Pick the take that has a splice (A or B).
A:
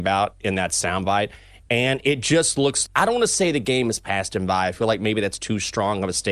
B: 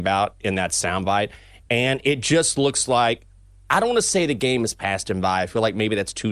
A